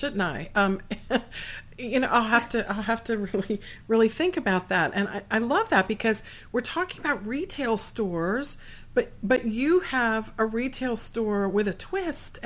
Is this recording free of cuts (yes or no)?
yes